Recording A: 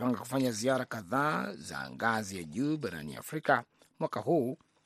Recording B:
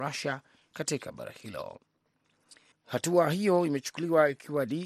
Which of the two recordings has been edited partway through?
B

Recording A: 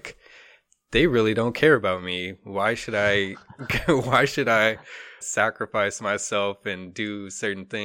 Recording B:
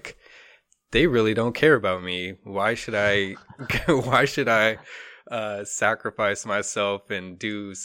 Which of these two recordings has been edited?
A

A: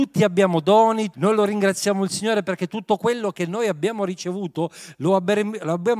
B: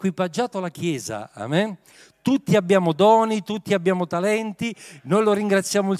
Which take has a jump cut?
A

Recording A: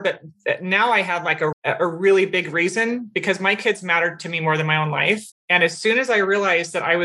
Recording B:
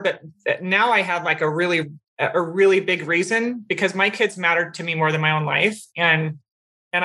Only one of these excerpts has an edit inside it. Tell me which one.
A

